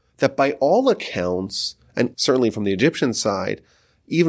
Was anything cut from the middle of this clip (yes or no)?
yes